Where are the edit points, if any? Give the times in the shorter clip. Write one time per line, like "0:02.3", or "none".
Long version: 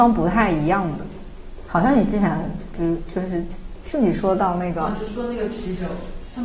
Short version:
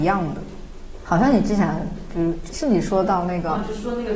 0:02.5